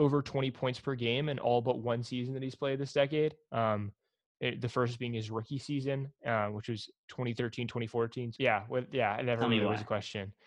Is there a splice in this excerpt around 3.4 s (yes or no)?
no